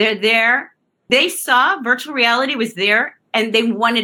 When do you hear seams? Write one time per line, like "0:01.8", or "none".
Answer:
0:01.0